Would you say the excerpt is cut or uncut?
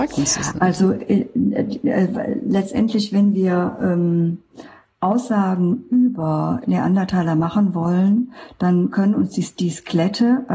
uncut